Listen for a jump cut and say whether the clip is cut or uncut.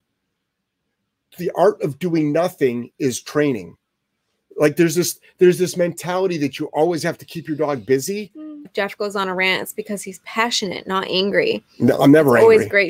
cut